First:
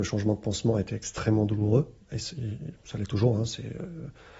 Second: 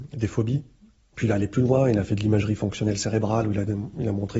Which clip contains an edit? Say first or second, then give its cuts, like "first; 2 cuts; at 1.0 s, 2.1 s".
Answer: second; 1 cut; at 1.1 s